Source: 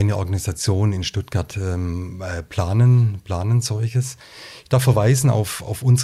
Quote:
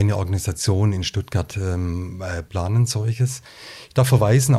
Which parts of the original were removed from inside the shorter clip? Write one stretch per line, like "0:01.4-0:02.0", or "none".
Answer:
0:02.5-0:03.2